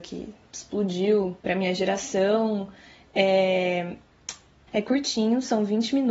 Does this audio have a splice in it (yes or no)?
yes